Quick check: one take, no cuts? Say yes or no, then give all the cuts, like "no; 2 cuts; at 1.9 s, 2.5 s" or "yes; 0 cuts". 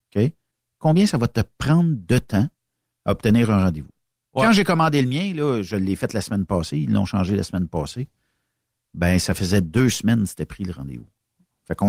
yes; 0 cuts